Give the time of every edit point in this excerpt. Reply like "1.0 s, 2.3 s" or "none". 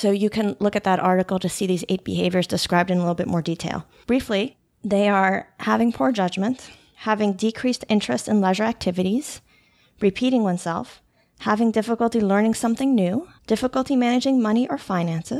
13.4 s